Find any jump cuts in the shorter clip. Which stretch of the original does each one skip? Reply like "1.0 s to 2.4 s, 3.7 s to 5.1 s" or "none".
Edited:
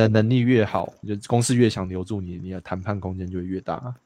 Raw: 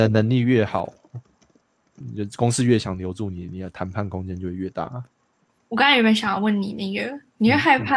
1.0 s to 2.1 s